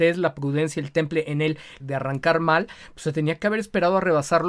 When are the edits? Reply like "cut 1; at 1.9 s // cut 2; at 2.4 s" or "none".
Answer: cut 1; at 1.8 s